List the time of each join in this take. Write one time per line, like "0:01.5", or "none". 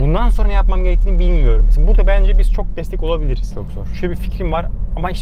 0:03.5